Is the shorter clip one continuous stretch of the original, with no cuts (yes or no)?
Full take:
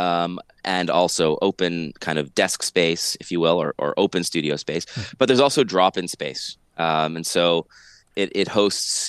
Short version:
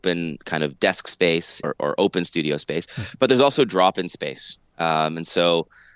no